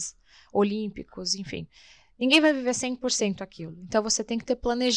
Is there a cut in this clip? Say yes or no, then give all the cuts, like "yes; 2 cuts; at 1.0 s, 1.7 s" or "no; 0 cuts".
no; 0 cuts